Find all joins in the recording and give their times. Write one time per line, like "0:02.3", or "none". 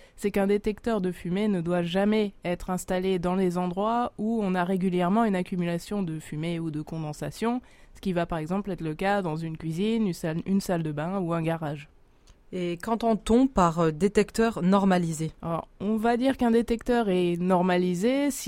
0:15.4